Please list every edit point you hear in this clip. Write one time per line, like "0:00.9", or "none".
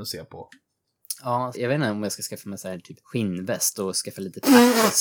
0:01.5
0:03.0